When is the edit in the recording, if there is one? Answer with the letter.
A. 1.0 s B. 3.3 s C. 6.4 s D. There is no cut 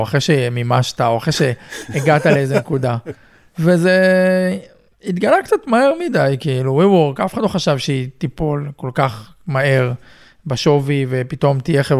D